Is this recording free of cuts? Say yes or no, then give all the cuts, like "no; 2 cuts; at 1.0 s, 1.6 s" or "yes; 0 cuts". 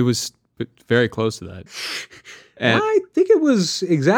no; 1 cut; at 1.7 s